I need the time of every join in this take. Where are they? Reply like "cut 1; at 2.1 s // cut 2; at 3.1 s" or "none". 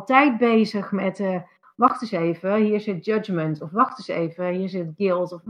none